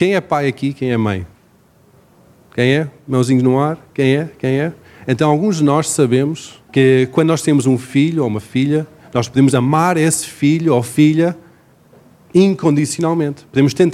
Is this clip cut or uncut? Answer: cut